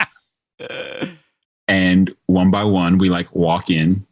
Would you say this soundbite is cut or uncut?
uncut